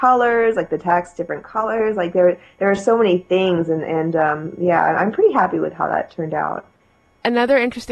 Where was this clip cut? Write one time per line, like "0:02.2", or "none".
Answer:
none